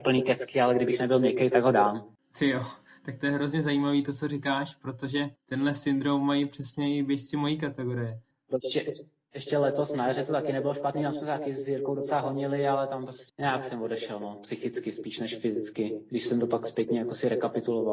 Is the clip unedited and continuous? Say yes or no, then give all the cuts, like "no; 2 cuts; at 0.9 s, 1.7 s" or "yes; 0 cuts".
no; 2 cuts; at 8.3 s, 13.3 s